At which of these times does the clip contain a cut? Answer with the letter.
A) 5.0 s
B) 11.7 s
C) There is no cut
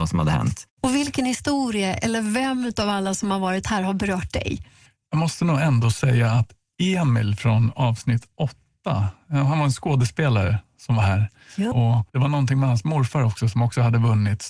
B